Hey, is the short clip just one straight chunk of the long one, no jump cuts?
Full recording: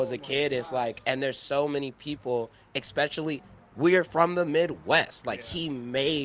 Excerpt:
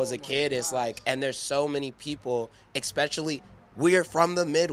yes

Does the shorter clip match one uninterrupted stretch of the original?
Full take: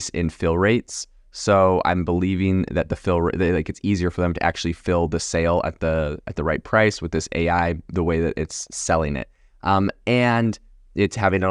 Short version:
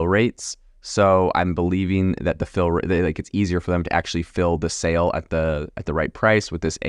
yes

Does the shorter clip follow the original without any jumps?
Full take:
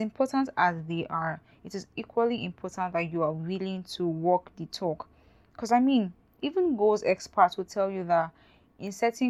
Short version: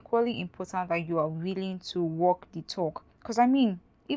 no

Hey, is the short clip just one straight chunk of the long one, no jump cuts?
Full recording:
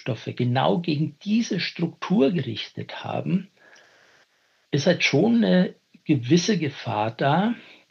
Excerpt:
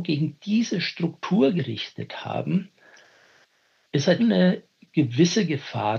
no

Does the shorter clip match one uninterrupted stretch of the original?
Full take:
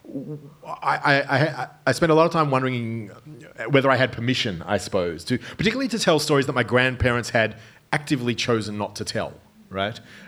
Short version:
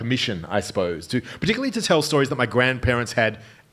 yes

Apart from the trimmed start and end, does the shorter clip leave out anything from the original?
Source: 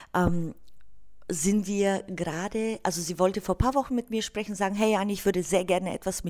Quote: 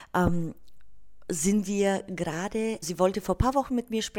yes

